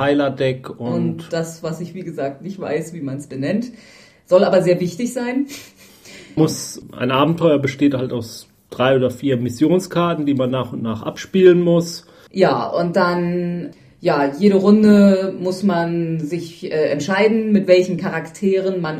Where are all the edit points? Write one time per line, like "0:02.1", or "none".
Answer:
0:06.4
0:12.3